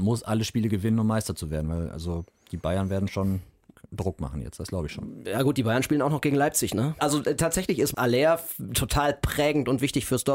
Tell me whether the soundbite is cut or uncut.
cut